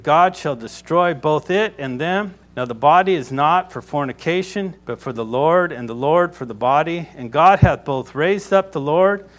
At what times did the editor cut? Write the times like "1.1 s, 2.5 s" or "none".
2.4 s, 4.8 s